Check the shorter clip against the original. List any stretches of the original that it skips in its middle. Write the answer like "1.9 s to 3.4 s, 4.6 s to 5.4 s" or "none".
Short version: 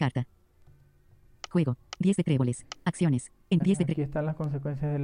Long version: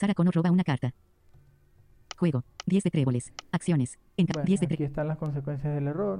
4.3 s to 4.4 s